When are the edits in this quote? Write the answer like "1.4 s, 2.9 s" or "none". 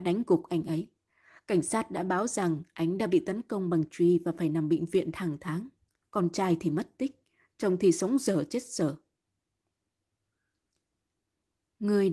6.0 s